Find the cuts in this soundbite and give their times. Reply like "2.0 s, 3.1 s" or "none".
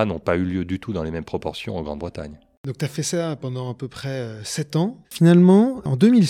5.0 s

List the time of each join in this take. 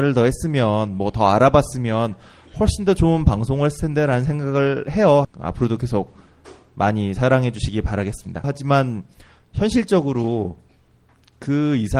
5.2 s, 8.4 s

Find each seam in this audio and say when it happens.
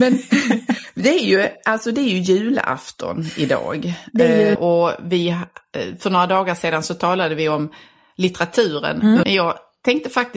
4.5 s, 9.2 s

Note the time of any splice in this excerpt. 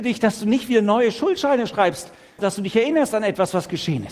2.4 s

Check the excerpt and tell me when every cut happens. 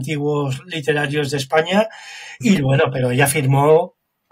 2.4 s

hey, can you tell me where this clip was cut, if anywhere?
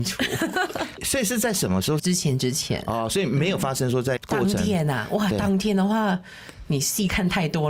2.0 s, 4.2 s

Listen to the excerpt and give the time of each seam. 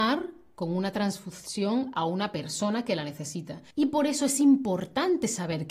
3.7 s

